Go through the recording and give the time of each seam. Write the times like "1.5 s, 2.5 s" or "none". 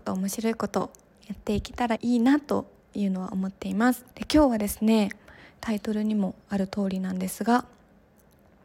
2.0 s, 4.1 s